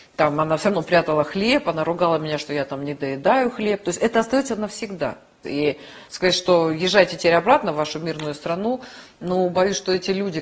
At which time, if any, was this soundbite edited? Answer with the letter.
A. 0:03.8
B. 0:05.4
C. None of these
B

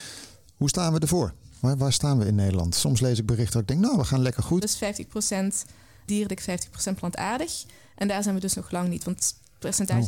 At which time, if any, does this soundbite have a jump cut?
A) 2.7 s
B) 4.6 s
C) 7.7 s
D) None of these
B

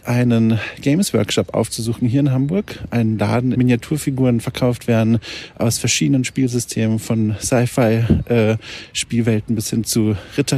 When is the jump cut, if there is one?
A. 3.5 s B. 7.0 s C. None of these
A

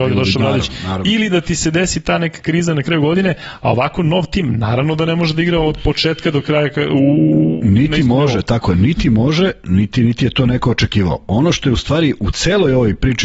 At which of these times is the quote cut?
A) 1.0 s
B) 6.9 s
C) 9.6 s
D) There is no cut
D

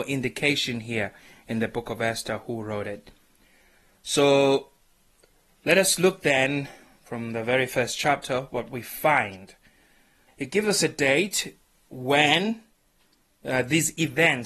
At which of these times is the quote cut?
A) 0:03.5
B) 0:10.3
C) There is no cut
B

